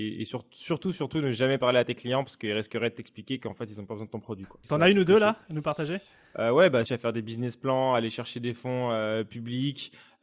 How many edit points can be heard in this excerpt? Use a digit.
2